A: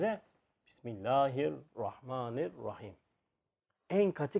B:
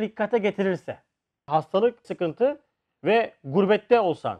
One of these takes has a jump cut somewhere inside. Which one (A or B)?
B